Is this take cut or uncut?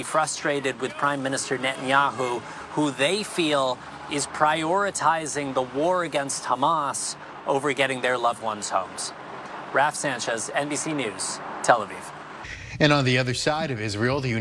uncut